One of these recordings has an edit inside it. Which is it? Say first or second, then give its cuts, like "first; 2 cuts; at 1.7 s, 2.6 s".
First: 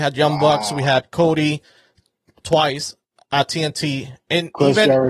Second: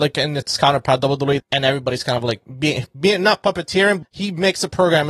second; 2 cuts; at 1.4 s, 4.0 s